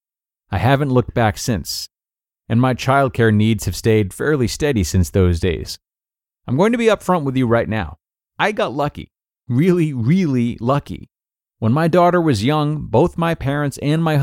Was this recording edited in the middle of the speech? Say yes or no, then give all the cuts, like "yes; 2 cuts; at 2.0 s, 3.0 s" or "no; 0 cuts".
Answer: no; 0 cuts